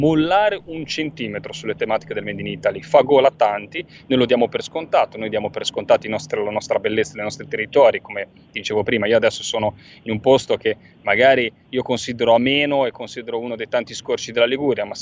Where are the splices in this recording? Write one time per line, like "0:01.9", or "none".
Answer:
none